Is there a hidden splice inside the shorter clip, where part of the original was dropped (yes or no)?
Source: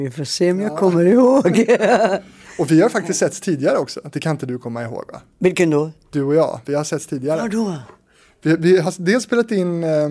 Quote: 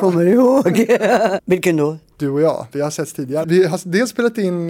yes